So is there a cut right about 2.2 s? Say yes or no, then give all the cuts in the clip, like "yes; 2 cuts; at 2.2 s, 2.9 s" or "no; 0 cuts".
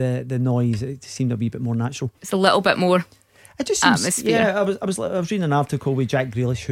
no; 0 cuts